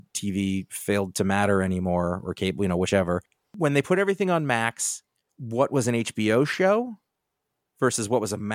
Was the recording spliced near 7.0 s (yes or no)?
no